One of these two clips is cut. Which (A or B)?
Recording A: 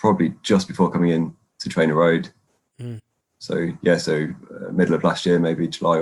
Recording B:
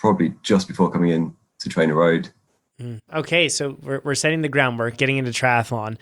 B